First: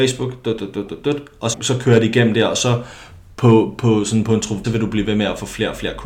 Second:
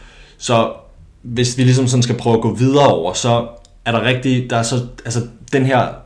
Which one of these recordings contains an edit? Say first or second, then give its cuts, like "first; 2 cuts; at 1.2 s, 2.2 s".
first; 2 cuts; at 1.5 s, 4.6 s